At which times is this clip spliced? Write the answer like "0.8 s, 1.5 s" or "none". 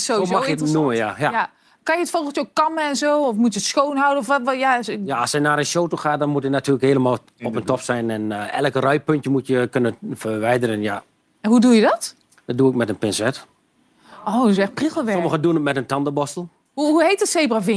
none